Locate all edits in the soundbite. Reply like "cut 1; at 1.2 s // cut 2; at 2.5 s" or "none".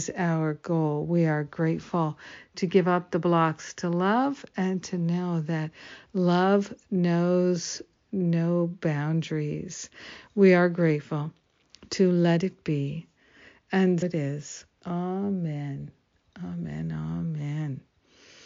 cut 1; at 14.0 s